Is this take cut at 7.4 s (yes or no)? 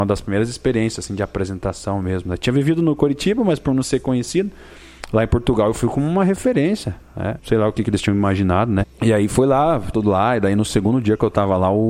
yes